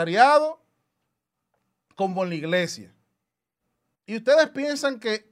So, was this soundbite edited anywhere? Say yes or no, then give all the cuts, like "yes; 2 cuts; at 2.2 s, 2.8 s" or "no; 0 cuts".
yes; 1 cut; at 3.9 s